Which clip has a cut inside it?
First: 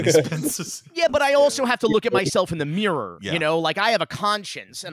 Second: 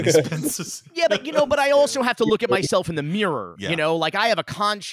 first; 1 cut; at 1.1 s

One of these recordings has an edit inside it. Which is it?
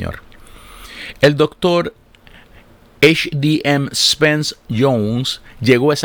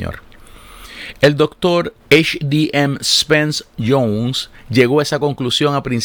second; 1 cut; at 2.0 s

